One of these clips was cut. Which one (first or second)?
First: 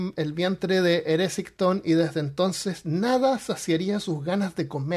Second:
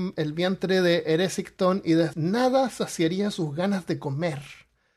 second